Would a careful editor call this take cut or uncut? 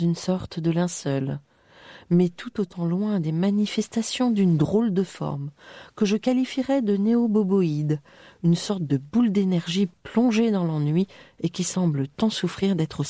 uncut